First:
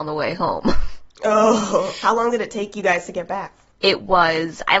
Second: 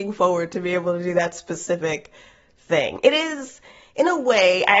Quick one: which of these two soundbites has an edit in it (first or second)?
first